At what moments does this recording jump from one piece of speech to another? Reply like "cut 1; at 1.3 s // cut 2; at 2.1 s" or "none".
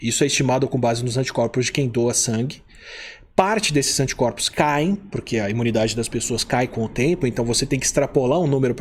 none